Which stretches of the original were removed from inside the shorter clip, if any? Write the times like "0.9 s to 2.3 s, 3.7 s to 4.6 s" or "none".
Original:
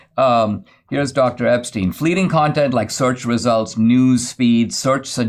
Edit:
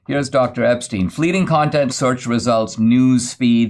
2.7 s to 2.9 s